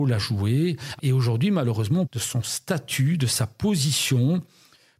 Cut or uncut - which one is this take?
cut